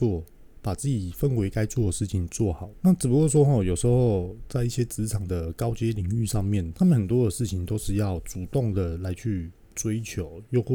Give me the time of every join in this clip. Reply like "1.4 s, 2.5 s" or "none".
2.7 s, 6.7 s